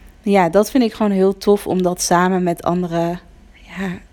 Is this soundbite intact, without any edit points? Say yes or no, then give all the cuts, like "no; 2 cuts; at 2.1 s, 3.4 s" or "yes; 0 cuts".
yes; 0 cuts